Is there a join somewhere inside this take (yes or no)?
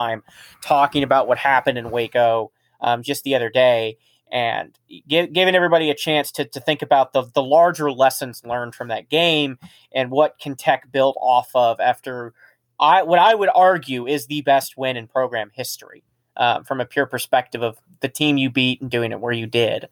no